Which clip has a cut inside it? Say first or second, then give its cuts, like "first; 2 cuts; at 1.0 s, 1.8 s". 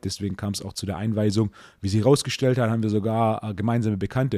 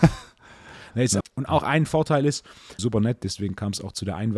second; 2 cuts; at 1.2 s, 2.8 s